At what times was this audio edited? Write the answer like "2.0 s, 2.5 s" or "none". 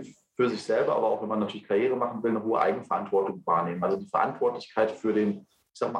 none